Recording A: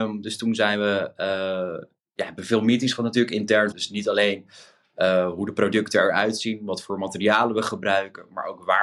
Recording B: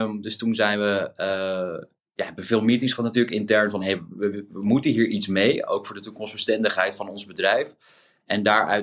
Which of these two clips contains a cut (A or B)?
A